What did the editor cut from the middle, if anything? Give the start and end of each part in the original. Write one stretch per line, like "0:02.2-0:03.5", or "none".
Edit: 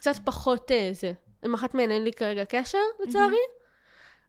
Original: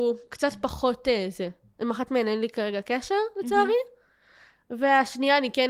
none